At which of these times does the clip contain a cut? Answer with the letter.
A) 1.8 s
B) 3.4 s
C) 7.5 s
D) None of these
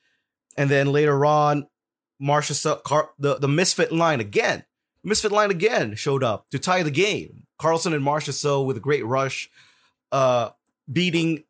B